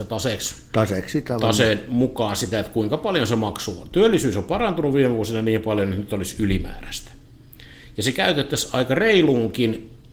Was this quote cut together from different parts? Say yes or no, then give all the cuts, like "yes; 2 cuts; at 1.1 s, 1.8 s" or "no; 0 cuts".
no; 0 cuts